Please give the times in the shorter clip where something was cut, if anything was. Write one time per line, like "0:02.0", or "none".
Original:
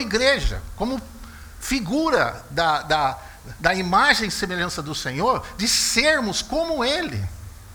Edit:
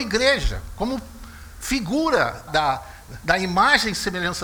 0:02.5

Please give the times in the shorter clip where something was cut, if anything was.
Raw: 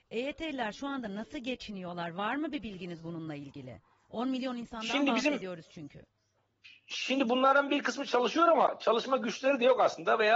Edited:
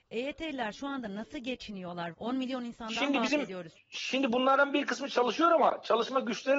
0:02.1
0:03.7

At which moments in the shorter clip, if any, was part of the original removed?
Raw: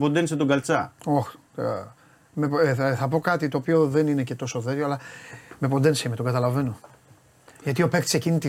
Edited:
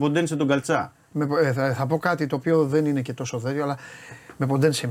0:00.9

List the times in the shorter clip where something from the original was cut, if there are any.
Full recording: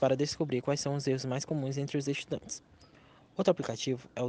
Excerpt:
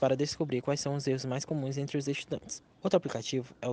0:02.7

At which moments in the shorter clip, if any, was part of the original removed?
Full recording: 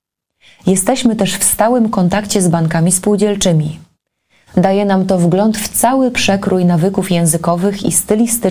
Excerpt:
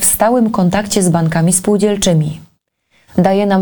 none

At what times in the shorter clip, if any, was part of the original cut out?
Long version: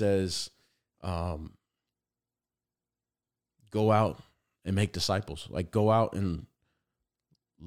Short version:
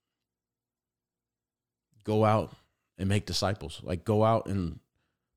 none

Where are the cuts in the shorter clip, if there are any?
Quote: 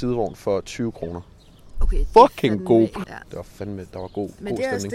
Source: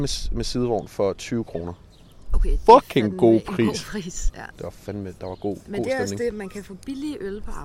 0:03.0

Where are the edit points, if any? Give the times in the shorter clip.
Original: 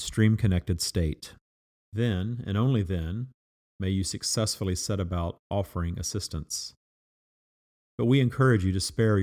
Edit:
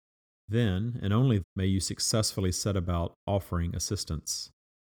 0:01.4

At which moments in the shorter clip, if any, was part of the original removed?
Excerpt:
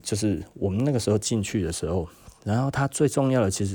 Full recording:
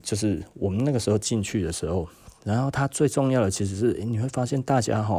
none

